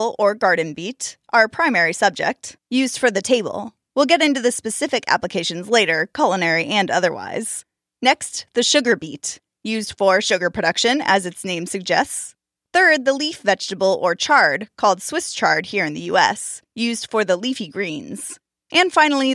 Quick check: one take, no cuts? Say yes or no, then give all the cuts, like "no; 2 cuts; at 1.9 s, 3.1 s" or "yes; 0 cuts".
yes; 0 cuts